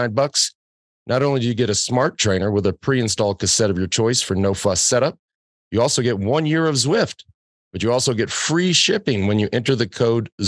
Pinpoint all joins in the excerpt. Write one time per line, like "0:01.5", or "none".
none